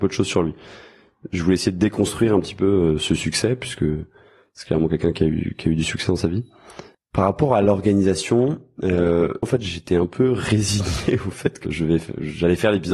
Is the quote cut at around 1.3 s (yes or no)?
no